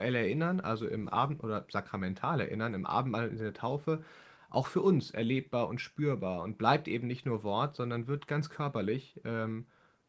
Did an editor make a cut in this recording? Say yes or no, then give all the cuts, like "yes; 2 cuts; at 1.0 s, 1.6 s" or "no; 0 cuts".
no; 0 cuts